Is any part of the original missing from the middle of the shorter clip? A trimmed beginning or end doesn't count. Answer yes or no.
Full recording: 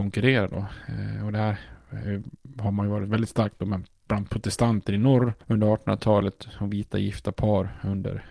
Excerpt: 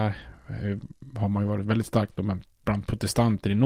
no